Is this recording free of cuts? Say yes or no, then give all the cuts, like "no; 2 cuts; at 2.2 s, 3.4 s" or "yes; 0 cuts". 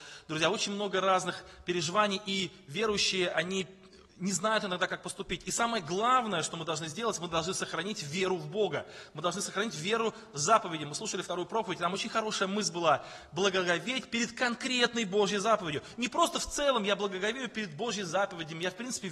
yes; 0 cuts